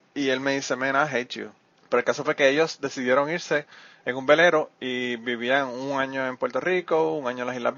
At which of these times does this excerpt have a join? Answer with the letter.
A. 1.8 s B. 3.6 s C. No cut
A